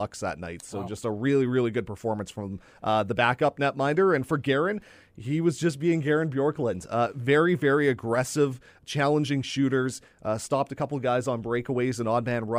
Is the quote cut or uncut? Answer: uncut